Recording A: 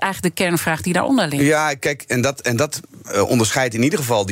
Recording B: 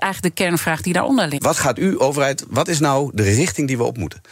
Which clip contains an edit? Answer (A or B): B